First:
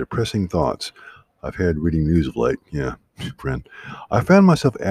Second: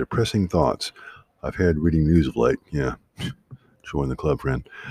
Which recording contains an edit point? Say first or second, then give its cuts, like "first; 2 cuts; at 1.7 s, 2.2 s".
first; 1 cut; at 3.4 s